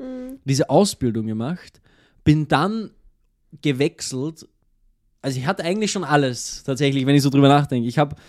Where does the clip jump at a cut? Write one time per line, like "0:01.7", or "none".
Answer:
none